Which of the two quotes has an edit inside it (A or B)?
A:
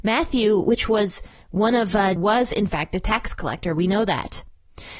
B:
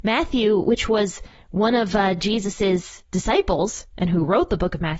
A